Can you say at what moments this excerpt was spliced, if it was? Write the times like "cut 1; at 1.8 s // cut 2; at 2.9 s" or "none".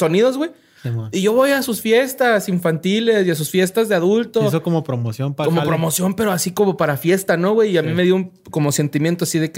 none

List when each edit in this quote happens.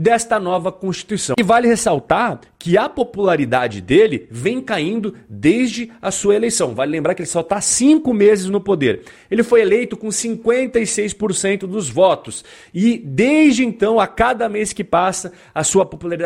none

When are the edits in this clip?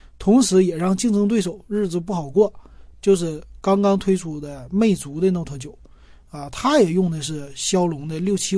none

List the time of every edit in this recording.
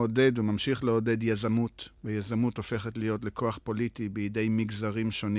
cut 1; at 2.0 s

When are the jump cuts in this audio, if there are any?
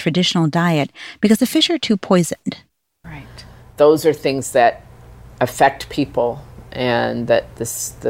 cut 1; at 3.0 s

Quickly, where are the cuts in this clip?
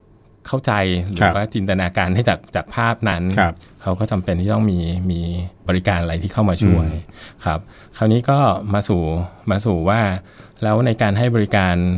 cut 1; at 3.1 s // cut 2; at 5.6 s

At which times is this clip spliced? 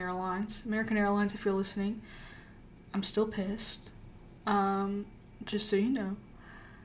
none

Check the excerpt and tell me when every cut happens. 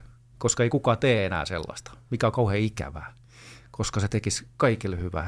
none

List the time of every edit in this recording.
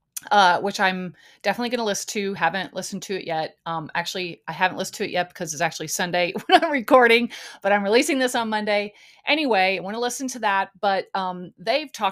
none

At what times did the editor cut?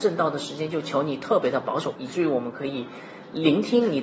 cut 1; at 1.9 s

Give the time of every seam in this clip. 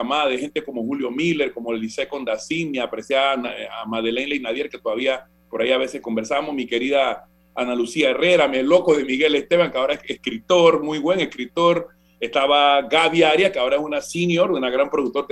none

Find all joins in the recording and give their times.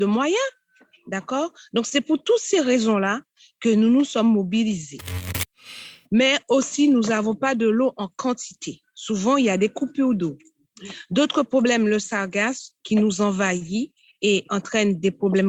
cut 1; at 6.0 s

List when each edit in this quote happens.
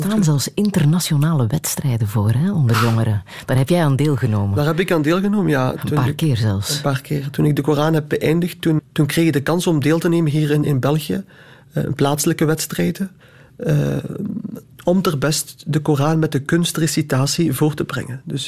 cut 1; at 8.8 s

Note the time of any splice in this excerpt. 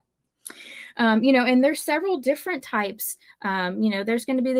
none

